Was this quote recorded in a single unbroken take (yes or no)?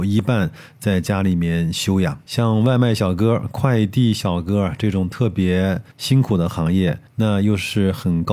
yes